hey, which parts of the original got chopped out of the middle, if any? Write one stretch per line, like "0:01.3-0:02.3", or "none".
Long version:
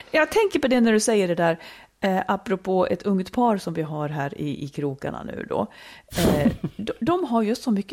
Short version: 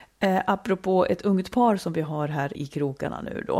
0:04.4-0:04.6